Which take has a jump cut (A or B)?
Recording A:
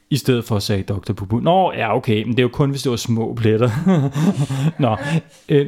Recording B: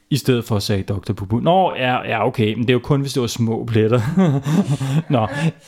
A